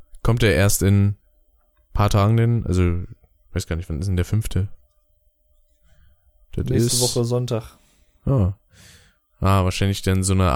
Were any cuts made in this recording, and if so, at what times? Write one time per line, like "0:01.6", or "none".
none

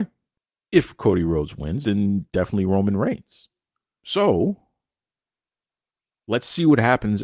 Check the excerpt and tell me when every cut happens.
0:01.8
0:04.0

